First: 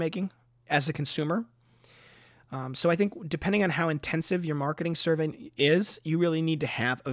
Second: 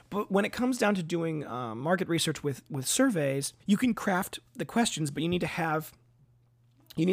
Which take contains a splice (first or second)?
second